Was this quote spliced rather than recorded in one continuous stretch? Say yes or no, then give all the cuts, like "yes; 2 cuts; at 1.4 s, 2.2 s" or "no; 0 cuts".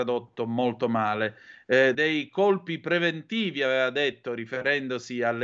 yes; 1 cut; at 1.9 s